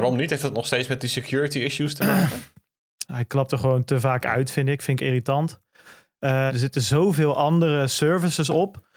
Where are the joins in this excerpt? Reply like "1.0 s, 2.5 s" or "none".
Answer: 3.0 s, 6.5 s